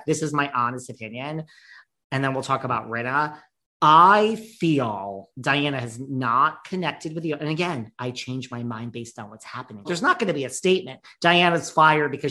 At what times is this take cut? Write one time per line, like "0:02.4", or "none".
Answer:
0:09.8